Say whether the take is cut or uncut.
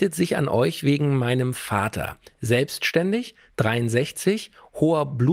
uncut